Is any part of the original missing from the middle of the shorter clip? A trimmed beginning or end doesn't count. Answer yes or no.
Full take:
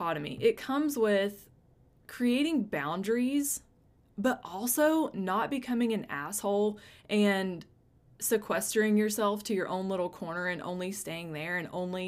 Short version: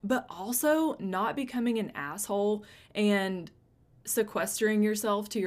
no